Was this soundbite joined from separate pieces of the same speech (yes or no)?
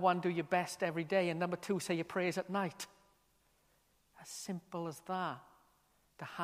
no